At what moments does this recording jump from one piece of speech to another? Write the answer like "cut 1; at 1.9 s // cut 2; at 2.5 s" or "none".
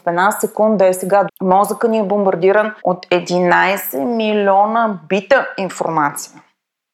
cut 1; at 1.3 s // cut 2; at 2.8 s

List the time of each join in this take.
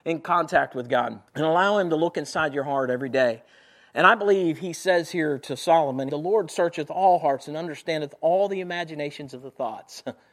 cut 1; at 1.3 s // cut 2; at 6.1 s

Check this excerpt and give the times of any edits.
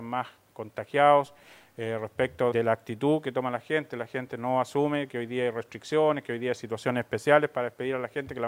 cut 1; at 2.5 s

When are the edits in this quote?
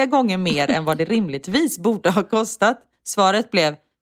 none

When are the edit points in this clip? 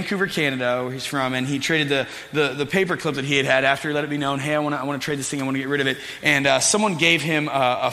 none

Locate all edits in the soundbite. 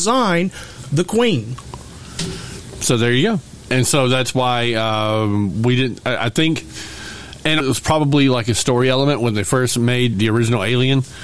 cut 1; at 7.6 s // cut 2; at 10.1 s

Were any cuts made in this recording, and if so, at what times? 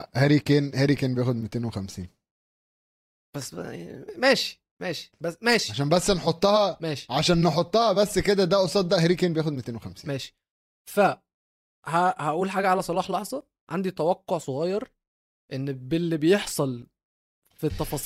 none

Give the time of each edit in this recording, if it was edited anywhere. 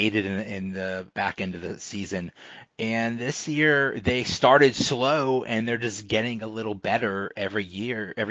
cut 1; at 1.1 s

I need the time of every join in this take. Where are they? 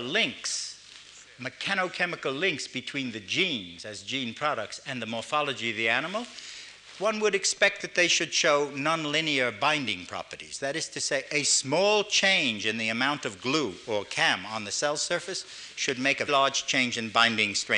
cut 1; at 16.3 s

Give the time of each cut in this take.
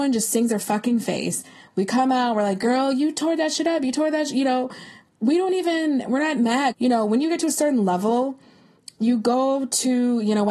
cut 1; at 6.7 s

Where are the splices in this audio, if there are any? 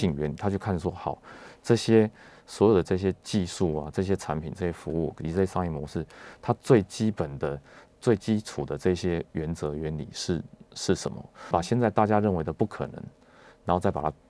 cut 1; at 11.5 s

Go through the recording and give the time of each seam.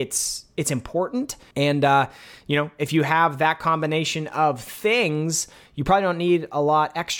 cut 1; at 1.5 s

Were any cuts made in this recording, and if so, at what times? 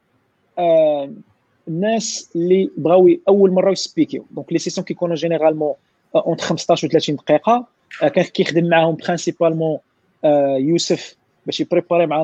cut 1; at 1.6 s

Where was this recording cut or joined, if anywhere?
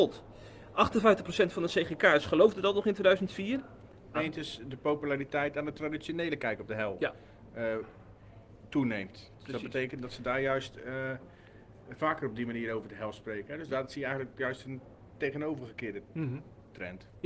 cut 1; at 4.1 s

